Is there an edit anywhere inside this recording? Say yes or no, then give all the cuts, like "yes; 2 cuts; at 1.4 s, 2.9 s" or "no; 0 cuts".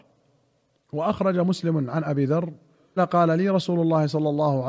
yes; 1 cut; at 3.0 s